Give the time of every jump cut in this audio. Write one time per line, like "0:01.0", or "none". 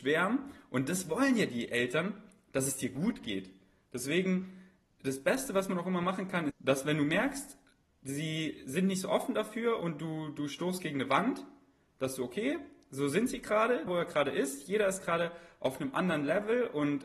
0:06.5
0:13.9

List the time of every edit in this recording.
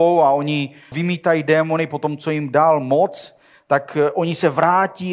0:00.9

